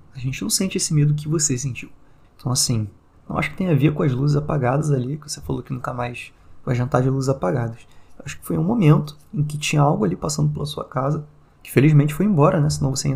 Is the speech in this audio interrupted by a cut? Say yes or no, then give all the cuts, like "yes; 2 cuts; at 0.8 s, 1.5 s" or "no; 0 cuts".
yes; 1 cut; at 2.2 s